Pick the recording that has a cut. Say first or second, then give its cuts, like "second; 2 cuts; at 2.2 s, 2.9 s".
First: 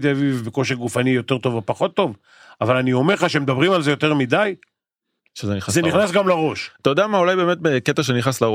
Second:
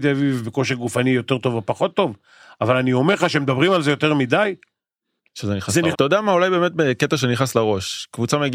second; 1 cut; at 5.9 s